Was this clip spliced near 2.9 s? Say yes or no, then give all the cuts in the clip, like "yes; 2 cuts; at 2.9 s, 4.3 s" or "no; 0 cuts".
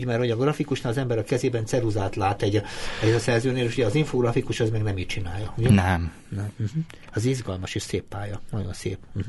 no; 0 cuts